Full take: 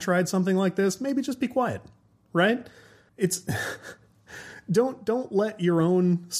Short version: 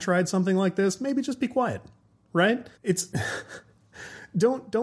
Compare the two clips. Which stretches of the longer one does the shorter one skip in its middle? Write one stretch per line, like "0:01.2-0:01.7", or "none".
0:02.7-0:03.1